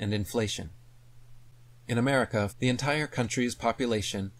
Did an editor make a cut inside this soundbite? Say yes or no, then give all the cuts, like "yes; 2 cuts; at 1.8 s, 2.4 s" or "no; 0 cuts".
yes; 1 cut; at 2.5 s